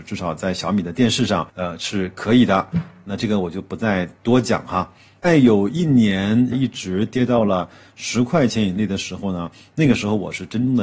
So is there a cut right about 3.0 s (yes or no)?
no